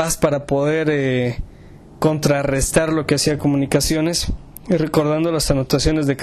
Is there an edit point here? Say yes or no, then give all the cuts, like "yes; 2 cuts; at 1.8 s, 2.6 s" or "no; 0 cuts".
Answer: no; 0 cuts